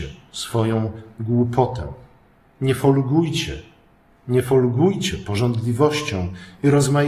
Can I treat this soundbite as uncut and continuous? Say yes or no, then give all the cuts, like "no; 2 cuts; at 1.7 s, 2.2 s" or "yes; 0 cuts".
yes; 0 cuts